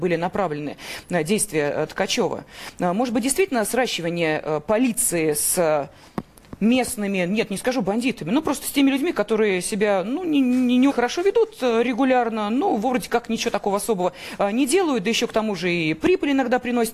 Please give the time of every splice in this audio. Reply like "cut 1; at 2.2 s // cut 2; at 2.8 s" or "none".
cut 1; at 10.9 s